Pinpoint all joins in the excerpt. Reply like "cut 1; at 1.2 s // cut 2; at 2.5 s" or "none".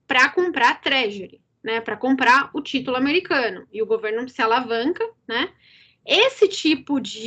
cut 1; at 3.7 s // cut 2; at 6.0 s